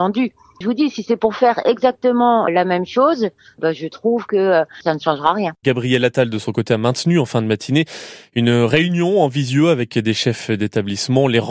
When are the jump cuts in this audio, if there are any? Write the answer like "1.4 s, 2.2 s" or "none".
5.6 s